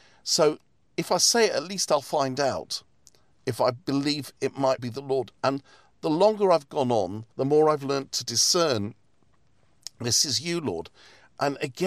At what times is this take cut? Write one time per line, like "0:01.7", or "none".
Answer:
0:04.8
0:07.3